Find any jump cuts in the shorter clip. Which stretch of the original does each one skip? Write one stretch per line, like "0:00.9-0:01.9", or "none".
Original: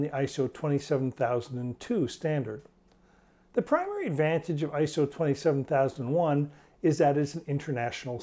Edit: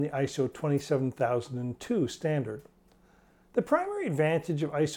none